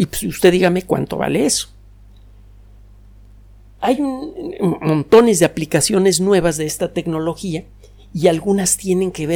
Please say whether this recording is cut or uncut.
uncut